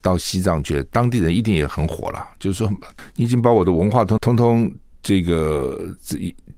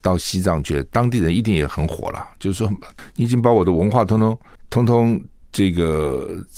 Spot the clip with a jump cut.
first; 1 cut; at 4.2 s

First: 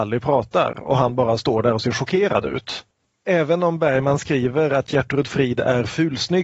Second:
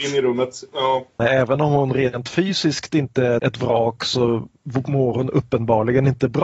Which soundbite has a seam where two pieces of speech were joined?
second; 2 cuts; at 1.2 s, 3.4 s

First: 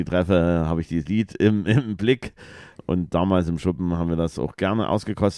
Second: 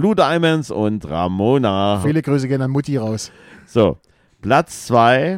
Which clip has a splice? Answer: second; 1 cut; at 2.0 s

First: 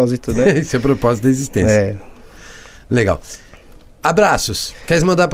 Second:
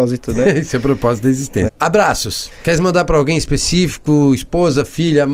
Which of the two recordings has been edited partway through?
second; 1 cut; at 1.7 s

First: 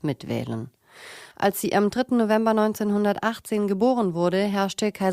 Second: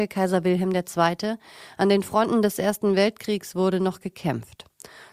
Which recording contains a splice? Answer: first; 1 cut; at 1.3 s

